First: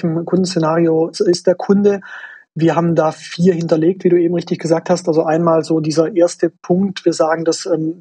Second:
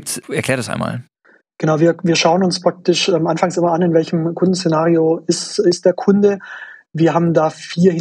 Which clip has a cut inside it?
first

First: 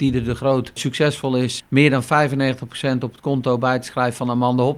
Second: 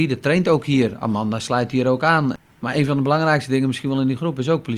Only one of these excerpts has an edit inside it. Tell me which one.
first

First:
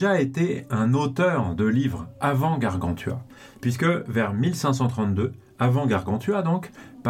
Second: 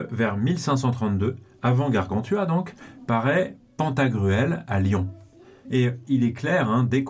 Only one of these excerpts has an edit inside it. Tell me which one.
second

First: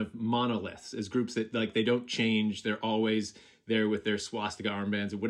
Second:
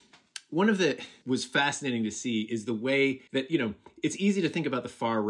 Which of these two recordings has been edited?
second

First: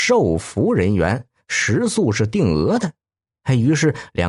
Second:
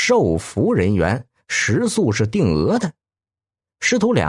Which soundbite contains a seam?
first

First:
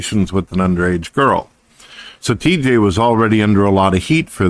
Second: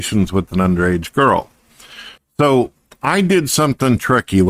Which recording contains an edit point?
second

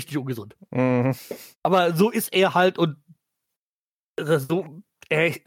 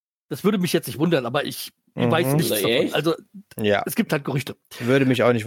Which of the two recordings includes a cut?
first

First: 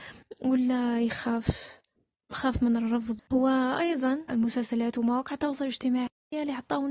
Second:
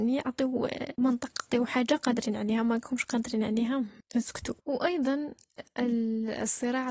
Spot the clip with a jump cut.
second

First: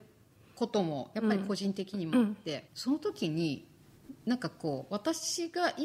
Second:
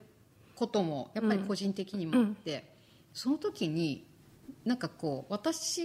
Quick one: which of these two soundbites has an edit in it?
first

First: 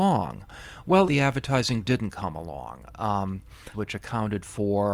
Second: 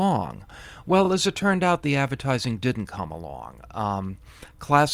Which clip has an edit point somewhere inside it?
first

